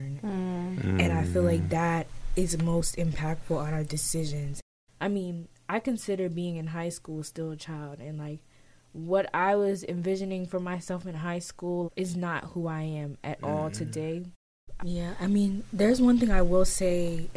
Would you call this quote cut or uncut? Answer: cut